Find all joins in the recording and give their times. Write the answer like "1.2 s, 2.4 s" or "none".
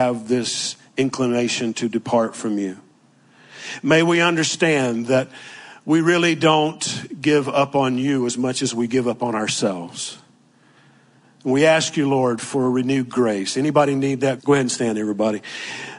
14.4 s